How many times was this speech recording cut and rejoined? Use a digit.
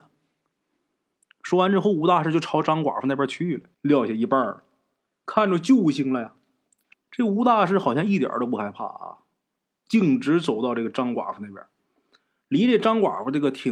2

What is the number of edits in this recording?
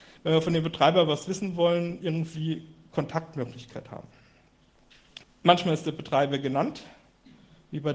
1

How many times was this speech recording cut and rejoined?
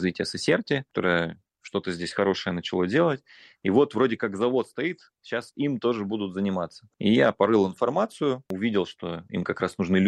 1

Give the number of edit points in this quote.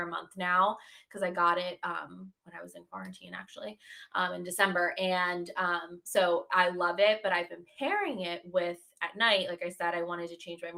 0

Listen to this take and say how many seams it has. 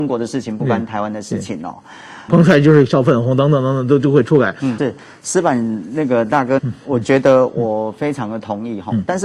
3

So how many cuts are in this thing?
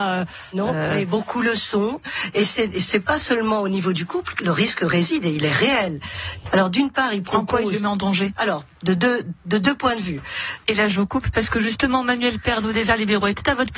3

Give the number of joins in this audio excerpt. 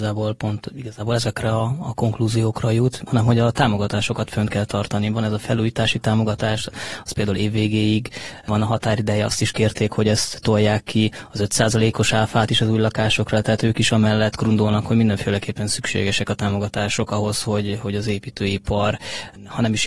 1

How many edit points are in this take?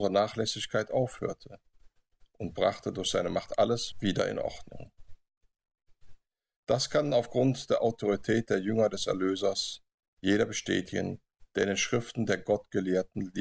1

